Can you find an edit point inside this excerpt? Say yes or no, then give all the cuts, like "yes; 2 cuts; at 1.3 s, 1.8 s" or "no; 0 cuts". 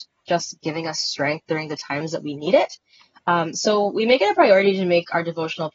no; 0 cuts